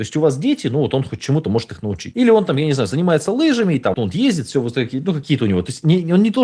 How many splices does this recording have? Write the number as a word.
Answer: one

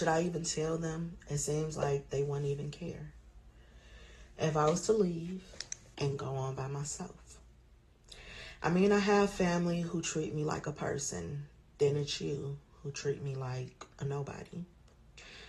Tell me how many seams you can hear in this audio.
two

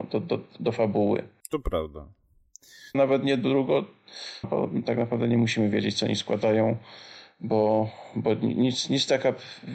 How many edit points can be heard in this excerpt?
two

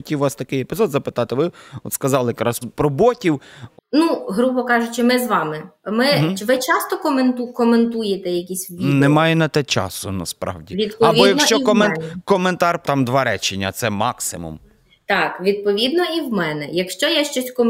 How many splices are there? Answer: three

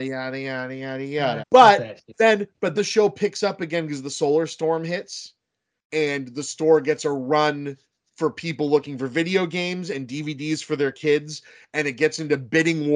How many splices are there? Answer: two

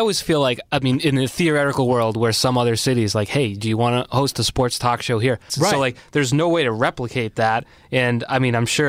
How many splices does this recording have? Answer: one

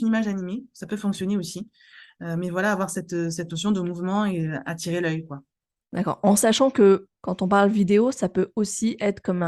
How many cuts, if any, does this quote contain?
one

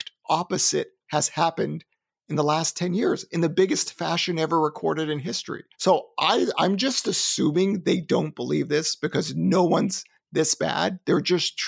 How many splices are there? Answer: one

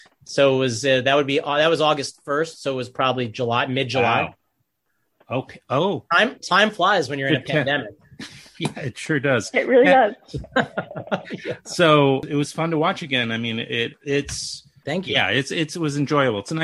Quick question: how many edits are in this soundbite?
zero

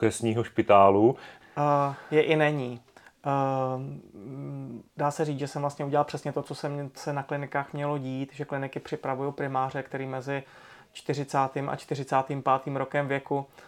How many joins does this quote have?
three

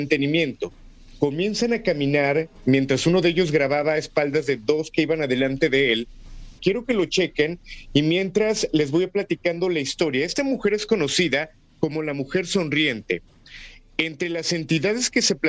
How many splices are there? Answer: one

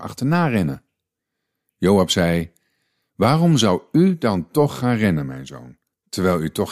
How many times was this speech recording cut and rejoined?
zero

